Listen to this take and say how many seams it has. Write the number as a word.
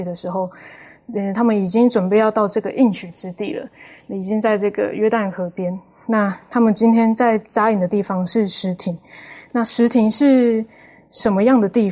zero